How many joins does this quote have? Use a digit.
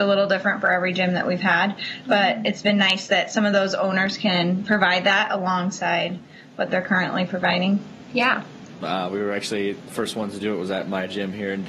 1